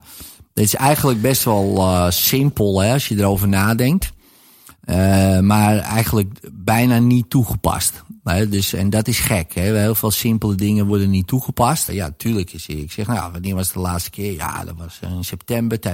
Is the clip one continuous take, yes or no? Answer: no